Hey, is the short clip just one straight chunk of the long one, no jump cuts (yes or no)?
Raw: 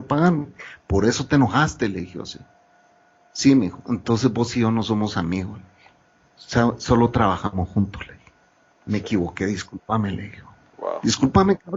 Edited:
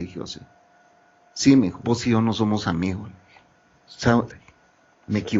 no